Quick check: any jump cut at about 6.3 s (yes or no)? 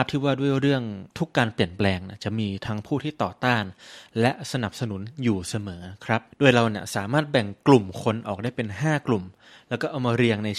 yes